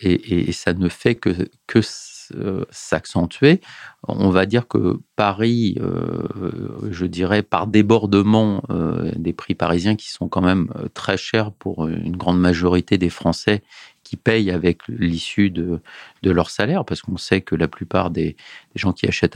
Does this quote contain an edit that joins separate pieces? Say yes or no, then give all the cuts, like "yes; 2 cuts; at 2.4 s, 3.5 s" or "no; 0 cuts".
no; 0 cuts